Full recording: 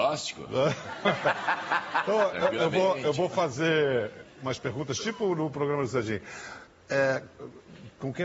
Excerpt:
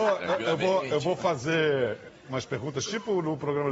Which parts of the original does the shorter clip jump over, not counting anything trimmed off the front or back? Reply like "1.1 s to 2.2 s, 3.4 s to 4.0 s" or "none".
none